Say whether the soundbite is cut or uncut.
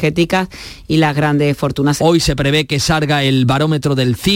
cut